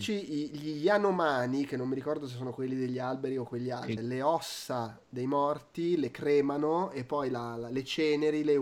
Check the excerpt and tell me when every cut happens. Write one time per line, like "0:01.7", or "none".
0:04.0